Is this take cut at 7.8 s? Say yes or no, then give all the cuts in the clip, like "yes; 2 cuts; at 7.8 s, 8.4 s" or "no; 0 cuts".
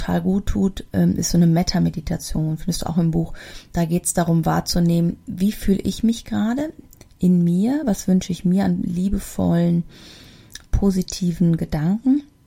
no; 0 cuts